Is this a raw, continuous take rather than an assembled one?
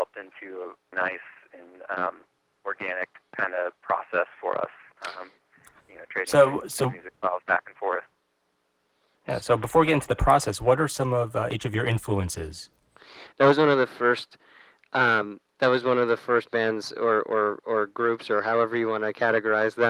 no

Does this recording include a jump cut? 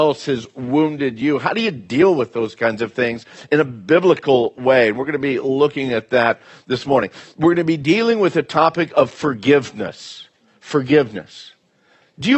no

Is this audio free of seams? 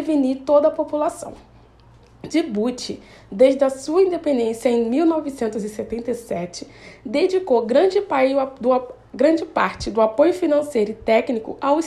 yes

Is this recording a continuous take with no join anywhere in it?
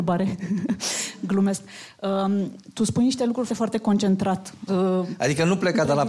no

